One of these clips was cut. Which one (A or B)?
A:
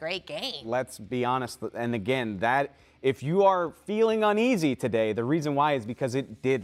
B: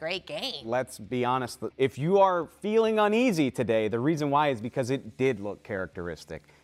B